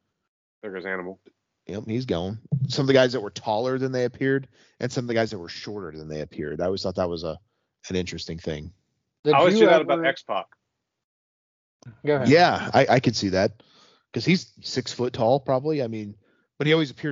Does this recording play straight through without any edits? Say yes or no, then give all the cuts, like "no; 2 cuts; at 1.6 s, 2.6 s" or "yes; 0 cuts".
yes; 0 cuts